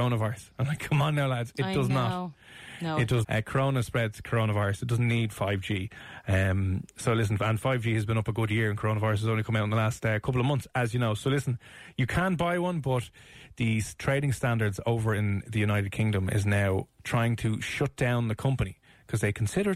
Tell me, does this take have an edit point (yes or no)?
yes